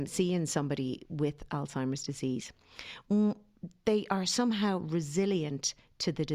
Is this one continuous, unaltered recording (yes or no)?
yes